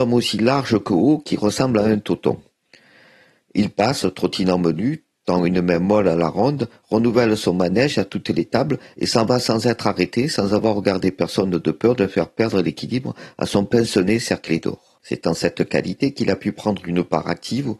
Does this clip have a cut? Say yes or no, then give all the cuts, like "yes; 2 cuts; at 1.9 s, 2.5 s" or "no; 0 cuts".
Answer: yes; 1 cut; at 15.0 s